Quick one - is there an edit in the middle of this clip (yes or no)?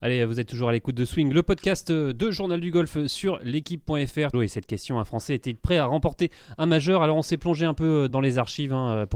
yes